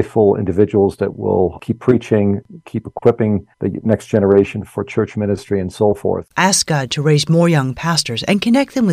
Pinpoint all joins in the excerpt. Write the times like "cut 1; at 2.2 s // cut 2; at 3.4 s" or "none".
cut 1; at 3.5 s